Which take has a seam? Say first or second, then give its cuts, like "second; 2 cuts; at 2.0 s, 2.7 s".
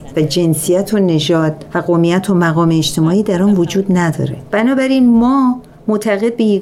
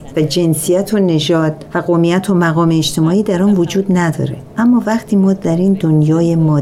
first; 1 cut; at 4.5 s